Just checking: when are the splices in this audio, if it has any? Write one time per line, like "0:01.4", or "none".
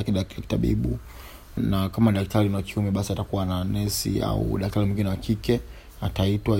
0:01.6